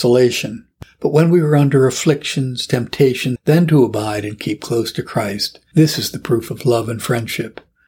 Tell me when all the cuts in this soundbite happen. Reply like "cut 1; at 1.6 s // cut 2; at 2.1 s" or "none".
cut 1; at 3.4 s

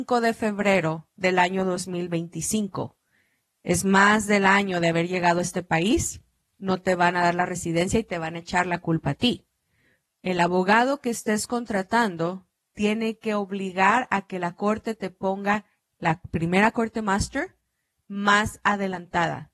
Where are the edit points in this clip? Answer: none

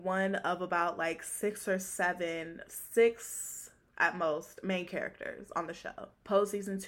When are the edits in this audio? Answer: none

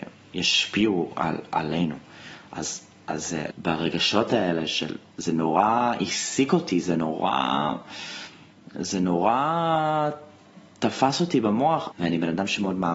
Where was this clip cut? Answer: cut 1; at 3.5 s // cut 2; at 11.9 s

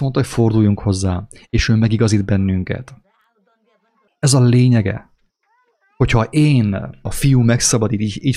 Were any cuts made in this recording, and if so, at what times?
cut 1; at 4.1 s // cut 2; at 7.1 s

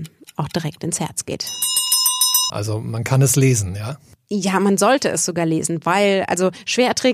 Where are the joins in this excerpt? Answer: cut 1; at 2.5 s

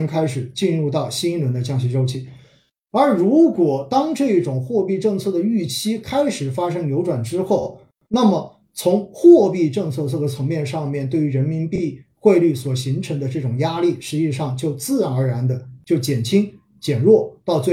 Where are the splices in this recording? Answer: none

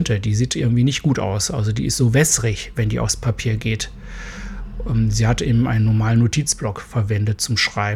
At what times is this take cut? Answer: none

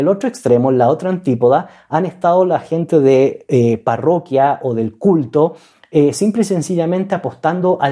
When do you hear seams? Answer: none

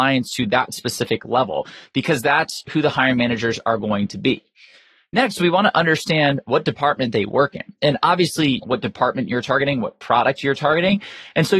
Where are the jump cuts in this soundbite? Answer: cut 1; at 8.6 s

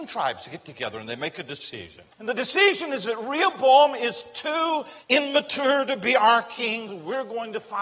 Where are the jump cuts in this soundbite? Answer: cut 1; at 2.1 s // cut 2; at 5.0 s // cut 3; at 6.9 s

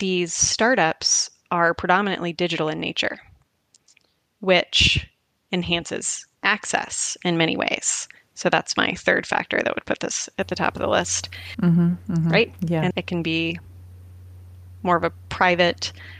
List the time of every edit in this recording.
cut 1; at 11.5 s // cut 2; at 12.9 s

